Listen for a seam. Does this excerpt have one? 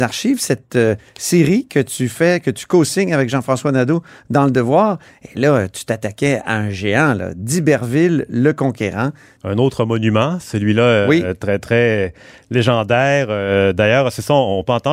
yes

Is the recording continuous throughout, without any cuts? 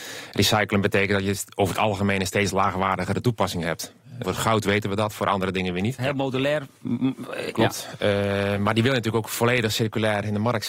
no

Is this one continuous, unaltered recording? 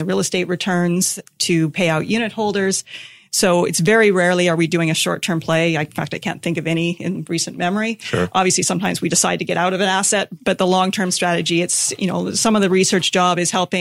yes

